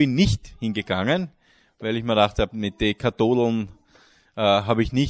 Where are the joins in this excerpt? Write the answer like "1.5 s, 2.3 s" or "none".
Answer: 2.5 s